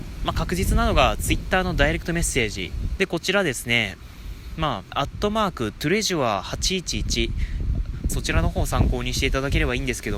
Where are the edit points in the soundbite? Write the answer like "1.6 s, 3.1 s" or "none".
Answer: 3.0 s, 4.9 s, 8.1 s